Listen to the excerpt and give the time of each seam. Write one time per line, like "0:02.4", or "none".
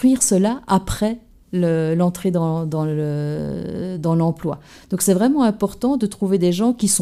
none